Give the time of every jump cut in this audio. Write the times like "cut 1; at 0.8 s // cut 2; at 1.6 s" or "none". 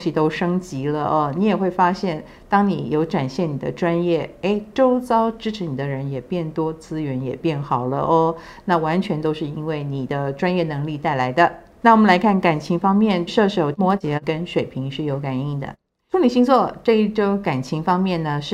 cut 1; at 11.8 s // cut 2; at 13.3 s